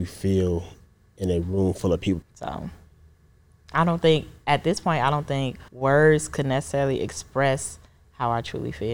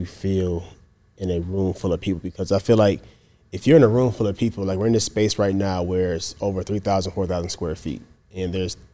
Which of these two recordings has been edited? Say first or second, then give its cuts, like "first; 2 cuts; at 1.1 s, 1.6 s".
first; 2 cuts; at 2.2 s, 5.7 s